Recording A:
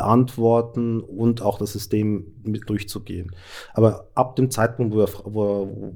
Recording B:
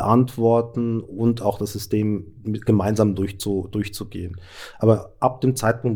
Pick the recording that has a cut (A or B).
A